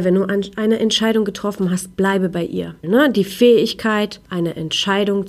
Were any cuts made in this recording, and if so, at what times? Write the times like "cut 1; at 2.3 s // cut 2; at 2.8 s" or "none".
cut 1; at 2.8 s